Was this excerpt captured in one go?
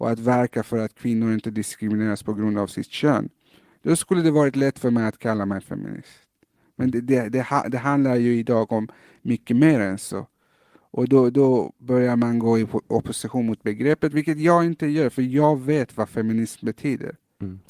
yes; 0 cuts

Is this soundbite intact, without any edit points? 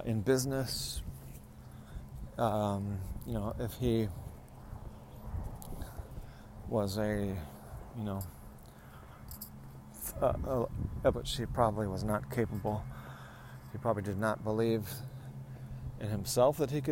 no; 1 cut; at 11.1 s

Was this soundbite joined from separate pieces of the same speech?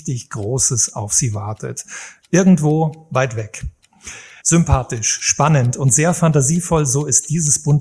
yes; 1 cut; at 4.4 s

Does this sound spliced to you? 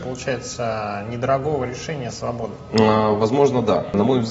no; 0 cuts

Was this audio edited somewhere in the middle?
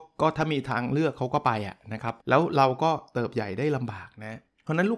yes; 1 cut; at 2.2 s

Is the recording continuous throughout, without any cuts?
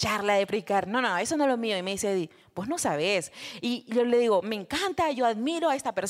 yes; 0 cuts

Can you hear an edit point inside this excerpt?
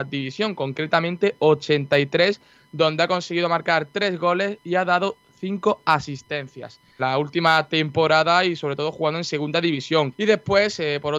yes; 2 cuts; at 7.0 s, 10.1 s

